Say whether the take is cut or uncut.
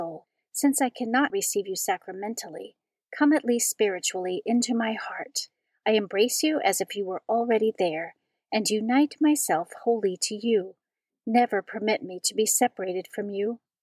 cut